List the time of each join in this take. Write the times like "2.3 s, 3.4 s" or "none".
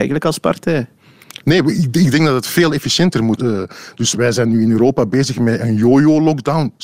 1.4 s, 3.4 s